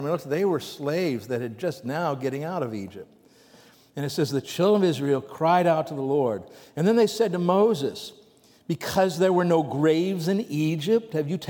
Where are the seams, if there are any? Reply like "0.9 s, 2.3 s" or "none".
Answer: none